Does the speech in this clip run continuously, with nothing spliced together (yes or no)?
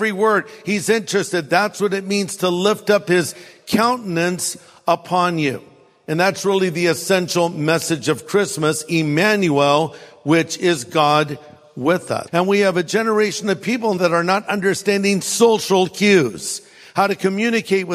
no